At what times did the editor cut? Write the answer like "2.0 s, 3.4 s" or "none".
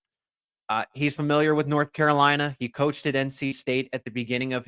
none